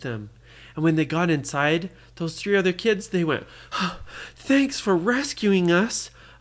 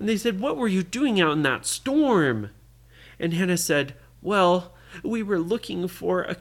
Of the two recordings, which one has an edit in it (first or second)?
first